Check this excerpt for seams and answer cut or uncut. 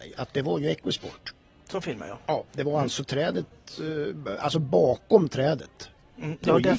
uncut